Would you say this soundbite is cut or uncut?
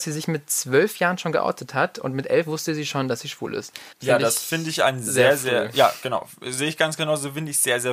cut